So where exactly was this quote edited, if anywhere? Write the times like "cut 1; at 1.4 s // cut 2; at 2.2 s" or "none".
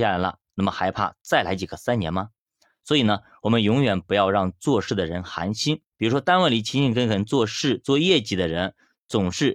none